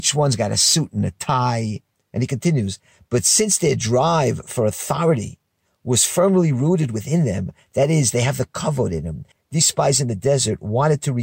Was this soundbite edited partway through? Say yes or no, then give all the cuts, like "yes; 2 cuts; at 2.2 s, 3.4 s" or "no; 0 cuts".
yes; 1 cut; at 1.9 s